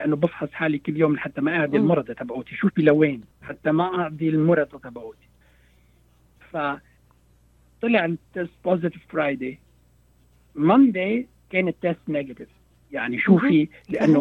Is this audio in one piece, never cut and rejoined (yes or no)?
no